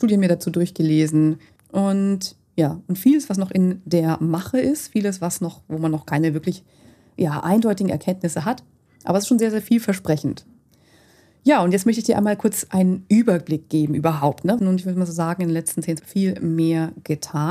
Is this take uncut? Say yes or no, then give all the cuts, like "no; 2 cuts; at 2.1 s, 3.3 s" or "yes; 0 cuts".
no; 3 cuts; at 1.6 s, 14.6 s, 16.0 s